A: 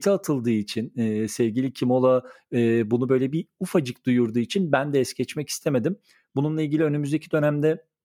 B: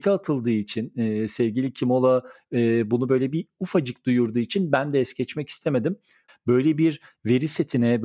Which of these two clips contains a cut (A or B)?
B